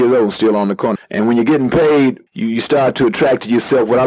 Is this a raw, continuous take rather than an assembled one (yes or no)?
no